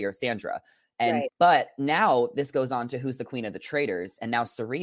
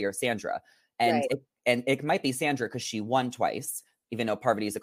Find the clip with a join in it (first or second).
first